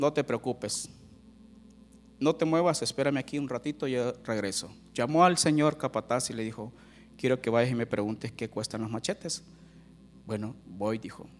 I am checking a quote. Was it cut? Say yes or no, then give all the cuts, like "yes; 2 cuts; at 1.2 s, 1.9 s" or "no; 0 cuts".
no; 0 cuts